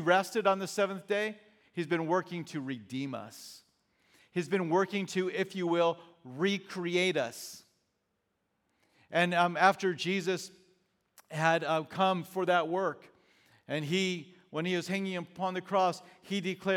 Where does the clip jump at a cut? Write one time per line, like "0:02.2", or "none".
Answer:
none

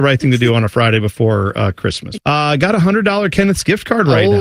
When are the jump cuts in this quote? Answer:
0:02.2

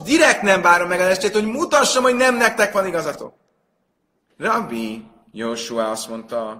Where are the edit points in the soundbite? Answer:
0:04.3

